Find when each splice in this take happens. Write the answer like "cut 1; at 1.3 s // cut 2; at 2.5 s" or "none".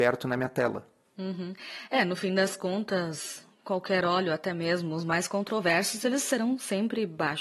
none